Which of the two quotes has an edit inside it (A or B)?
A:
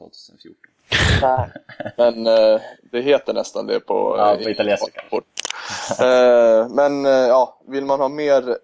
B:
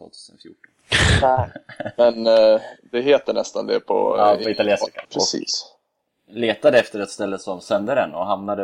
B